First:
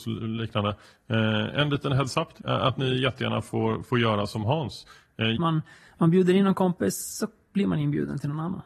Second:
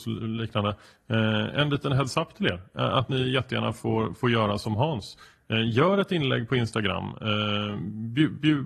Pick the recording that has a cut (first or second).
first